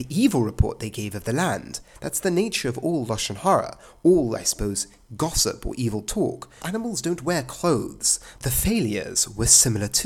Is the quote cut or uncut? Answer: cut